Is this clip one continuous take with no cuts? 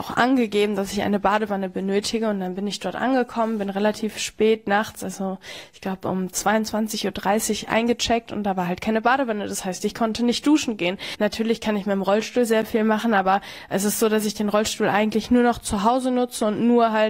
no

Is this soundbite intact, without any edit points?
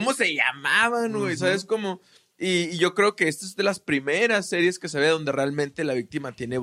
yes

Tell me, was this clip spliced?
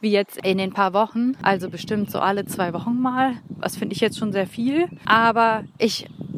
no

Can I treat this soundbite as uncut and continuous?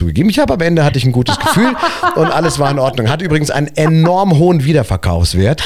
yes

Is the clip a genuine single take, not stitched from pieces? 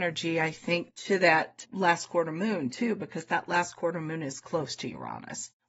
yes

